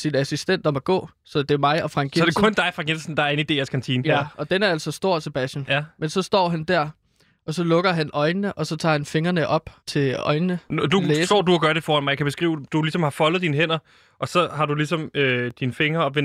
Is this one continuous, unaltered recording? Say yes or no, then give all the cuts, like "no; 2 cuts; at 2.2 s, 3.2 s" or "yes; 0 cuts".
no; 1 cut; at 9.8 s